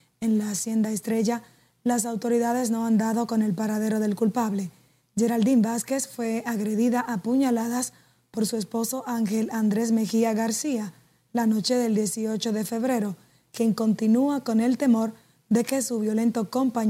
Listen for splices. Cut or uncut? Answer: uncut